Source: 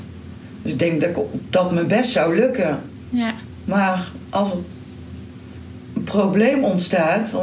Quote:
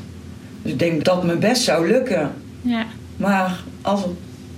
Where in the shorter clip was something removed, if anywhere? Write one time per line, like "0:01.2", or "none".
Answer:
0:01.0

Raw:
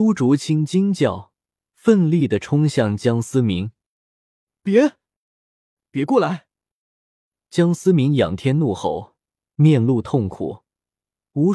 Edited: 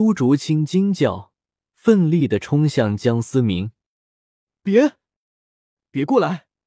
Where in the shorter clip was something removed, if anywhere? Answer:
none

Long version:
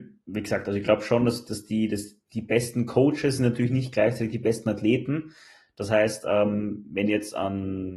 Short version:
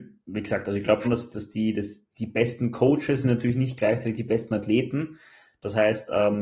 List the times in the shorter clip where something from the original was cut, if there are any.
0:01.0

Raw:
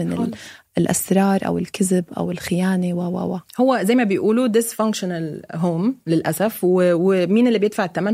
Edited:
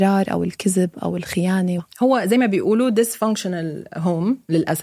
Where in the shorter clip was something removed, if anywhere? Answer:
0:01.8

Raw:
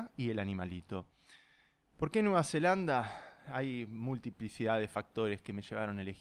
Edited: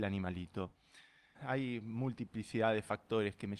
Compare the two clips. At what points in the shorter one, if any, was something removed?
0:01.3

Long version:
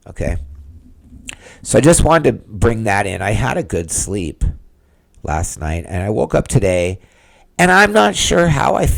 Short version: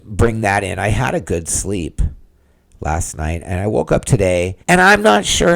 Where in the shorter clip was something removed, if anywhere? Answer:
0:04.6

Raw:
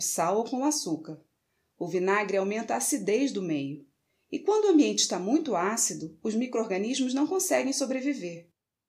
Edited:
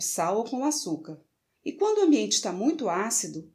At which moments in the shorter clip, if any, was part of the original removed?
0:01.5

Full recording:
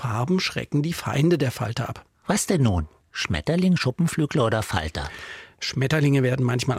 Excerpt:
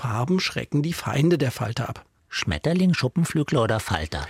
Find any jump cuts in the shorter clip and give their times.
0:02.2

